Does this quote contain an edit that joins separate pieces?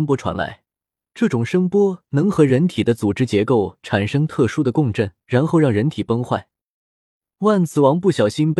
yes; 2 cuts; at 1.0 s, 5.2 s

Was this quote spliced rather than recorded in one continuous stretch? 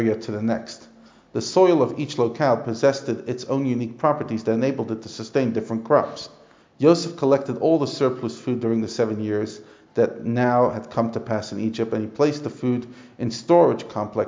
yes; 1 cut; at 6.6 s

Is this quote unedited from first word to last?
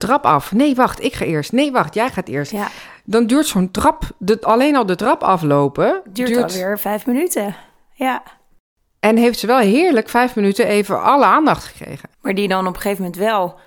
no; 1 cut; at 12.1 s

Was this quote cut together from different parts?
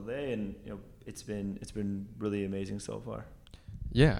no; 0 cuts

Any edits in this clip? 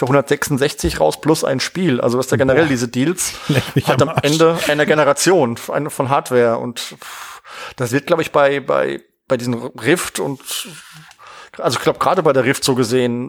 no; 0 cuts

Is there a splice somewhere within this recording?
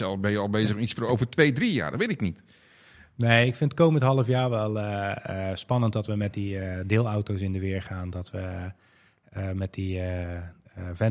no; 0 cuts

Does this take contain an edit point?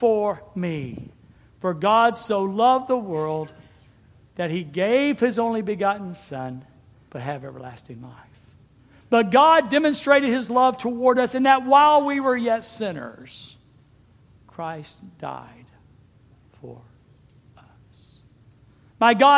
yes; 1 cut; at 7.1 s

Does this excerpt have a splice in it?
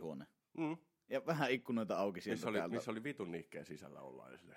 no; 0 cuts

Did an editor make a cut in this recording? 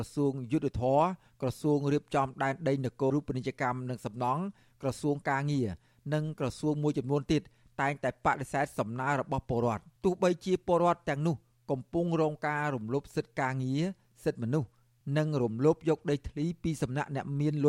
yes; 2 cuts; at 3.1 s, 10.0 s

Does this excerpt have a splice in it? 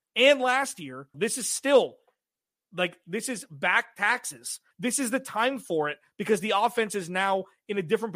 yes; 2 cuts; at 1.1 s, 4.7 s

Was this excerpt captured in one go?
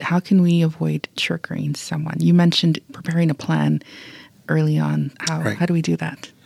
yes; 0 cuts

